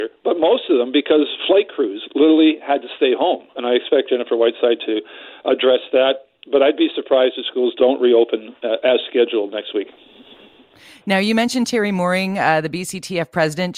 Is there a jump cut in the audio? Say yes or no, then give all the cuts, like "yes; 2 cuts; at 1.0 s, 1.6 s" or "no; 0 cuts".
yes; 1 cut; at 3.5 s